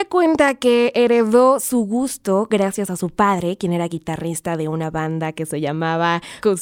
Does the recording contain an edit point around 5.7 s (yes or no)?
no